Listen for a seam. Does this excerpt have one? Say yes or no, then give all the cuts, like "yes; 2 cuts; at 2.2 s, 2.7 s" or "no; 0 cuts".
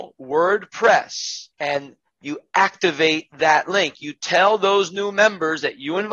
yes; 1 cut; at 1.5 s